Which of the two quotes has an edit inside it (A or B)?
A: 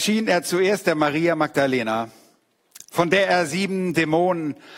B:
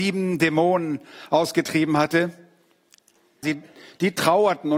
B